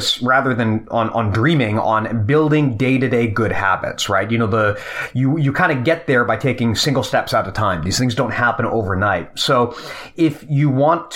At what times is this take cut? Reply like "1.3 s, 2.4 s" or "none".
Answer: none